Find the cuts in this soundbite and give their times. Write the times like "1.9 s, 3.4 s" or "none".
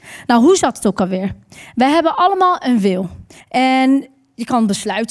3.4 s